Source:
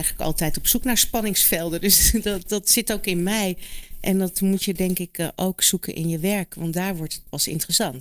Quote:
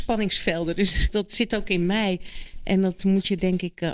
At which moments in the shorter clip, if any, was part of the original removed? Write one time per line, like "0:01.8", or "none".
0:01.1